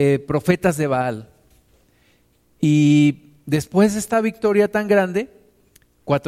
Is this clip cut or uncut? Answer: uncut